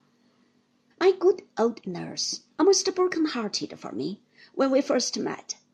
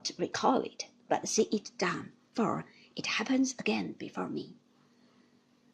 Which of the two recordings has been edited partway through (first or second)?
first